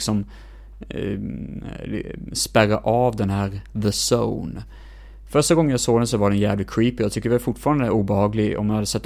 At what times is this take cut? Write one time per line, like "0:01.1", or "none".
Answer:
none